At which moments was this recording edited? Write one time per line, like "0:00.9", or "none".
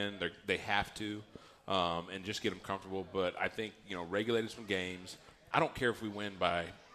none